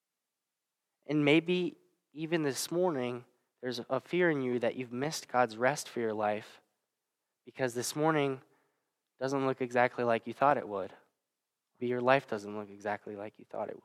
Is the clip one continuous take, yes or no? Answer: no